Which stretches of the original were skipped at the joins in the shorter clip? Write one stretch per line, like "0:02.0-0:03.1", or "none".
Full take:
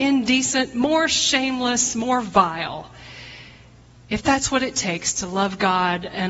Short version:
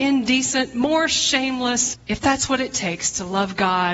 0:01.9-0:04.0